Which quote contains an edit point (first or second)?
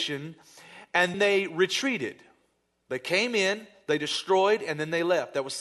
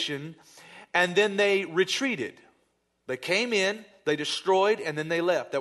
first